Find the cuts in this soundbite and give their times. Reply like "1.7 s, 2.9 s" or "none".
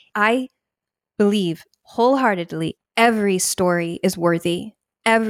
2.8 s